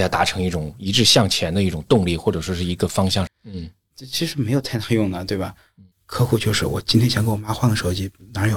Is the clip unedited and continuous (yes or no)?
no